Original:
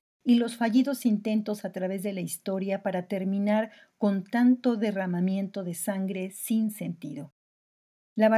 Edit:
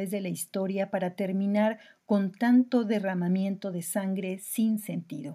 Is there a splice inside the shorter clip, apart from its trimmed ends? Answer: no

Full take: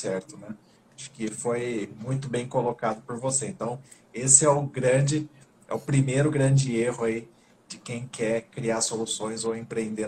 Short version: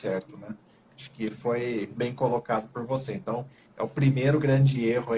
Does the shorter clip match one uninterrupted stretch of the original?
no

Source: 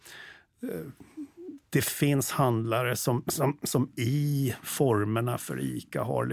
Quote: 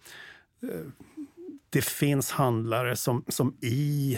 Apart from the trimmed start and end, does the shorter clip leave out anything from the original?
yes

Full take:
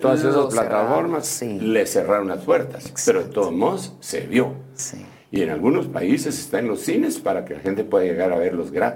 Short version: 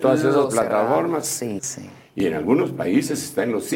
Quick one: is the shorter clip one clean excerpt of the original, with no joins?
no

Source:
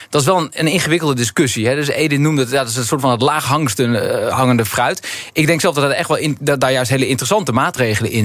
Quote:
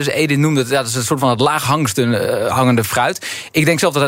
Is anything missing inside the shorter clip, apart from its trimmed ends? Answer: no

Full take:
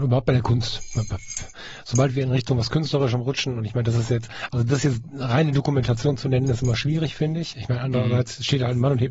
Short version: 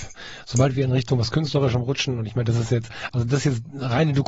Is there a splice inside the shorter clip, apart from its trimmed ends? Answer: no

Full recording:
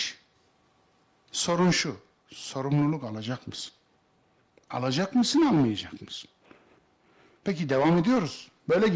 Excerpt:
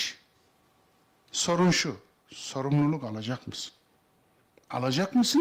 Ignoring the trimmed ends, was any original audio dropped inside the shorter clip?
no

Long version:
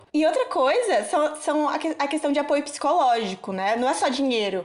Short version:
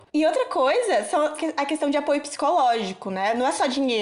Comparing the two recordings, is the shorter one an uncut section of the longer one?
no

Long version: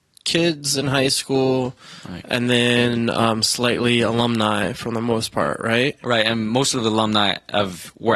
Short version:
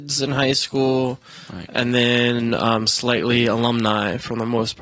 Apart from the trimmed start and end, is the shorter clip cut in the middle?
no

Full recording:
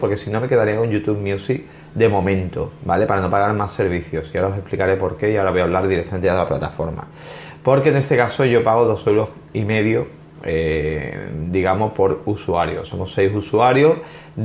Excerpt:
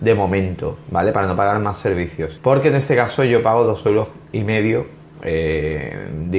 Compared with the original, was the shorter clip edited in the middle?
yes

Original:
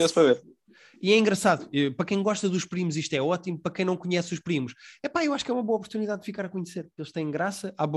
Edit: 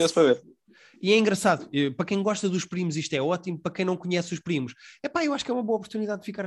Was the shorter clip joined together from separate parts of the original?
no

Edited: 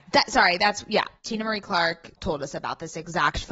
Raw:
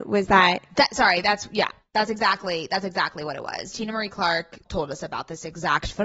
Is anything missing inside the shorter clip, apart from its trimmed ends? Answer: yes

